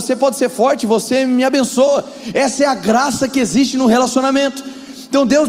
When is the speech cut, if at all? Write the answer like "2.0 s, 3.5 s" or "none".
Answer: 2.3 s